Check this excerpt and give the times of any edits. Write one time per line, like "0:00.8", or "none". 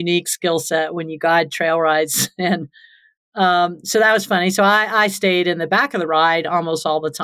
none